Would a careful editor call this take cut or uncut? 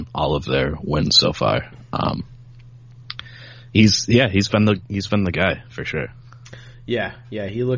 uncut